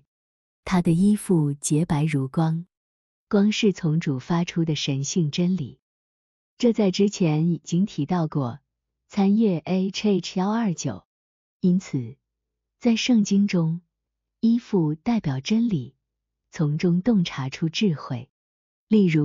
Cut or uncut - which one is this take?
uncut